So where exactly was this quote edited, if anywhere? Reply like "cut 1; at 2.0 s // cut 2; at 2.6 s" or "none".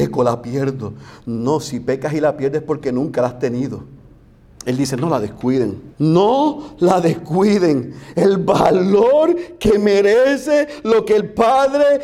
cut 1; at 4.6 s // cut 2; at 5.9 s

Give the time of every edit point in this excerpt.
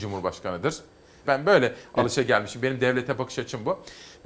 cut 1; at 1.2 s

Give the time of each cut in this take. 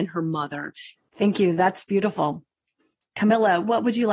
cut 1; at 1.0 s

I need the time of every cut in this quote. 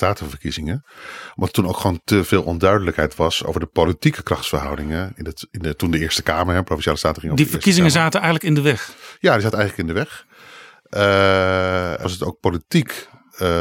cut 1; at 12.0 s

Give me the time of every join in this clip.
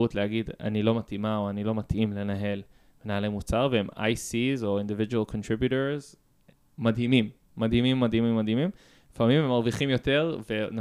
none

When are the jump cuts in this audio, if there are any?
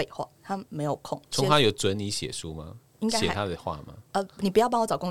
cut 1; at 1.3 s

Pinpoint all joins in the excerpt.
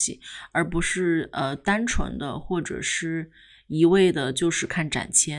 none

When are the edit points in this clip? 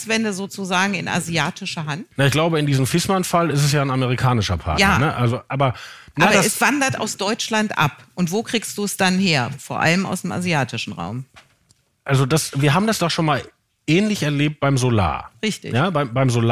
cut 1; at 2.1 s

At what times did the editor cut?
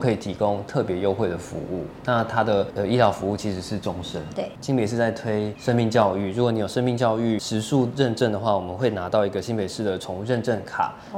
cut 1; at 4.3 s

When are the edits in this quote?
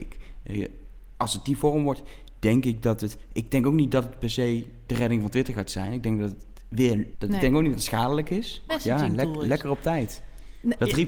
cut 1; at 7.1 s // cut 2; at 8.7 s

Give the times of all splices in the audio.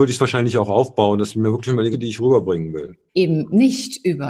cut 1; at 1.9 s // cut 2; at 3.1 s

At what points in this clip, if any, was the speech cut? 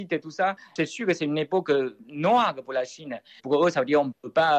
cut 1; at 3.4 s

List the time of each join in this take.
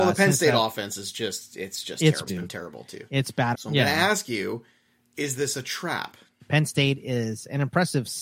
cut 1; at 2.3 s // cut 2; at 3.5 s // cut 3; at 6.4 s

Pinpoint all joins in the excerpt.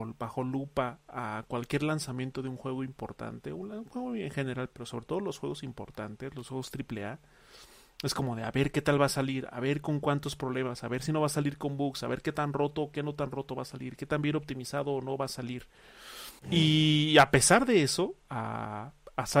cut 1; at 16.4 s // cut 2; at 18.2 s

